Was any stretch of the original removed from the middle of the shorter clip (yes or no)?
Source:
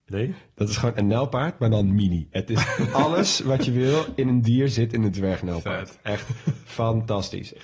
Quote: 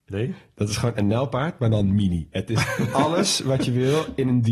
no